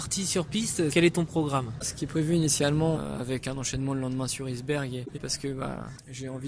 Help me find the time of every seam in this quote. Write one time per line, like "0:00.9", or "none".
0:00.9
0:02.9
0:05.1